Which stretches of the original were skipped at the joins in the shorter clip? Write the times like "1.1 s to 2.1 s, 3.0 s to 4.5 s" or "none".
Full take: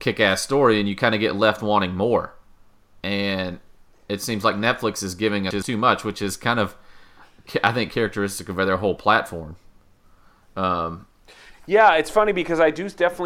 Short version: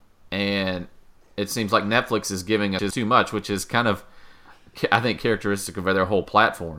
none